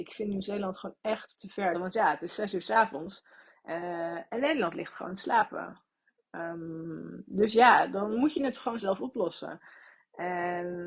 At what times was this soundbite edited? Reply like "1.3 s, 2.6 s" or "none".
1.7 s